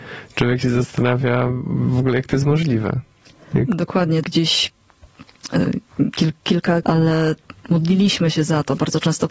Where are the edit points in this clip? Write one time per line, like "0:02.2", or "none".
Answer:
0:04.2
0:06.8